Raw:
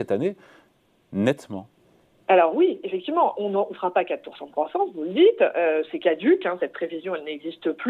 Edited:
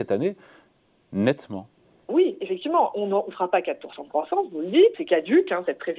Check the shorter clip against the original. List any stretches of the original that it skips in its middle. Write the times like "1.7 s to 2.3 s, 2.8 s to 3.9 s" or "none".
2.1 s to 2.5 s, 5.4 s to 5.9 s